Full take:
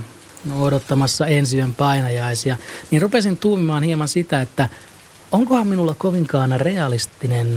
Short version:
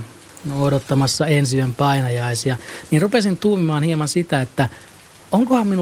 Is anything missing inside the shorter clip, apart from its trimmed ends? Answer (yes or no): no